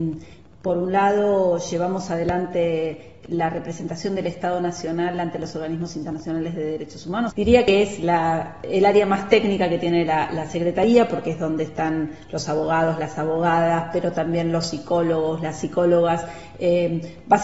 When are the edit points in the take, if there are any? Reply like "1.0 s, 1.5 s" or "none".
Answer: 7.3 s